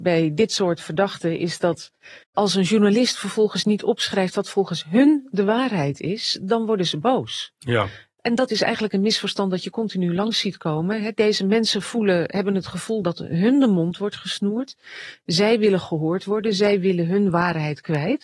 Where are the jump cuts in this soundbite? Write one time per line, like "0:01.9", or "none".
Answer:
0:02.2